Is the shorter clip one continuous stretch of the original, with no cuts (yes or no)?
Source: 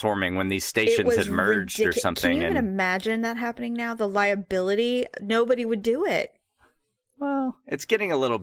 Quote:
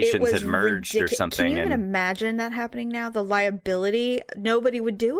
yes